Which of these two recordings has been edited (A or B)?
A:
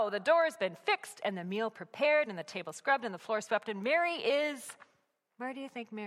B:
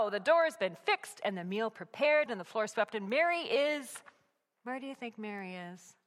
B